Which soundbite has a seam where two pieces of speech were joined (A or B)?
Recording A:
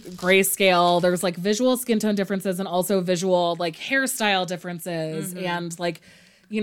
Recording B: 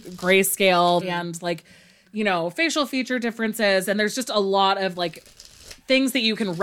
B